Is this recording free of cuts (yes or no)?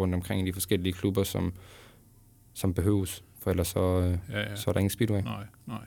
yes